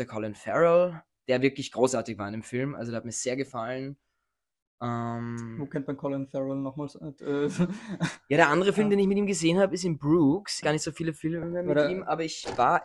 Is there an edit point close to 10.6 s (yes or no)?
yes